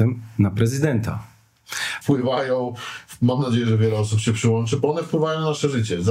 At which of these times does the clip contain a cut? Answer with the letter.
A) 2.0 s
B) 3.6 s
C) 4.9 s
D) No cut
A